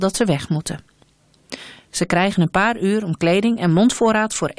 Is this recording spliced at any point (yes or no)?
no